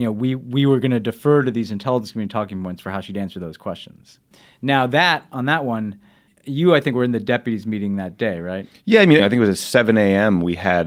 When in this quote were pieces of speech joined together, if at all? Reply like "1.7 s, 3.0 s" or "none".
9.2 s